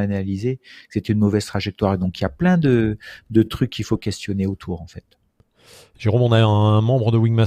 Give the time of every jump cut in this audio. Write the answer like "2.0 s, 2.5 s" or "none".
none